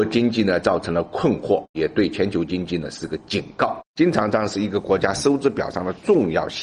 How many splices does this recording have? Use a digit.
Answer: 1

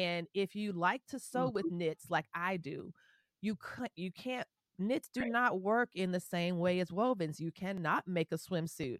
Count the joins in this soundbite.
0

